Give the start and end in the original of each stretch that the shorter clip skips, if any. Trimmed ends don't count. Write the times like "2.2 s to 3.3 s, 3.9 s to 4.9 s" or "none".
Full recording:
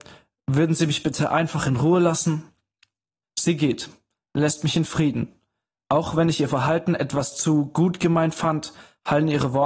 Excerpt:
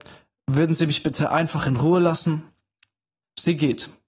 none